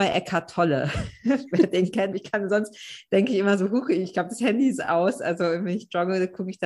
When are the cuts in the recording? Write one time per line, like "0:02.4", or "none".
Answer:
0:02.1